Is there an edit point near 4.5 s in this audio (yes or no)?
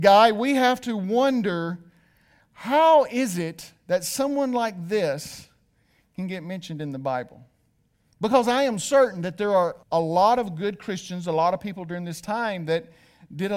no